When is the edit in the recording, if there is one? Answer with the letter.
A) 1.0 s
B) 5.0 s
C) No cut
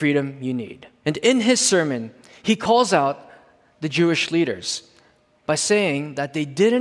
A